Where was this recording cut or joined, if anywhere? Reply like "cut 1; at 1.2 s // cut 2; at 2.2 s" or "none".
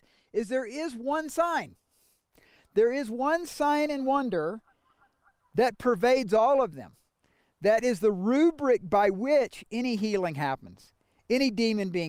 none